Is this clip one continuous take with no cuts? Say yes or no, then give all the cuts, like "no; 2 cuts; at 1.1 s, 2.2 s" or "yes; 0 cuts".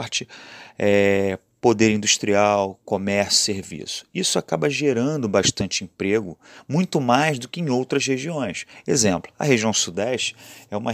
yes; 0 cuts